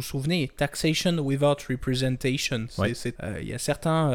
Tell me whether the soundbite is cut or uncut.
cut